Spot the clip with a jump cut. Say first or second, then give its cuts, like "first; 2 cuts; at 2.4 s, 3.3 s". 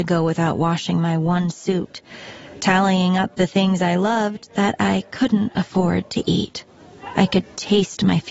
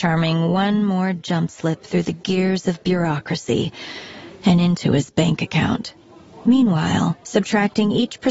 second; 1 cut; at 7.2 s